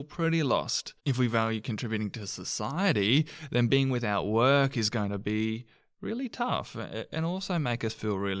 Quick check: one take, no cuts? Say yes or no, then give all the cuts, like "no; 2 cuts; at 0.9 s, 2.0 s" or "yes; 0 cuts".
no; 1 cut; at 1.0 s